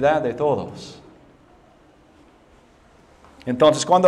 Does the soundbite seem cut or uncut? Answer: uncut